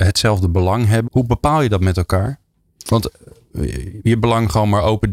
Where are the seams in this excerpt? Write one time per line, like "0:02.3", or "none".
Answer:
0:01.1